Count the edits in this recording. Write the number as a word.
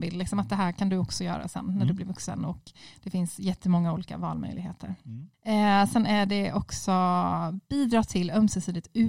one